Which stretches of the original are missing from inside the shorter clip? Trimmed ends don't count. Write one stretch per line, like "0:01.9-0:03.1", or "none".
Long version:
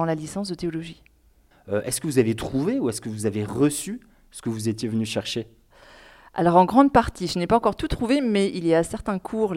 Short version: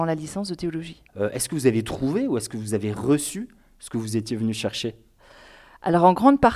0:01.1-0:01.6